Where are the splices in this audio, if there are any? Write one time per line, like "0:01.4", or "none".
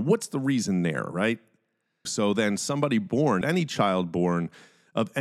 0:02.1
0:03.4